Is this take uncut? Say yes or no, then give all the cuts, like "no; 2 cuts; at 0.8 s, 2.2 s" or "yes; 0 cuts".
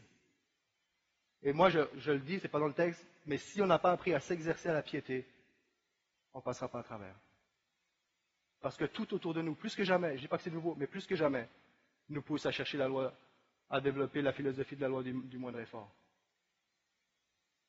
yes; 0 cuts